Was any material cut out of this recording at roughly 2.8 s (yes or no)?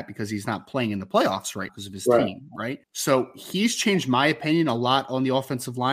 yes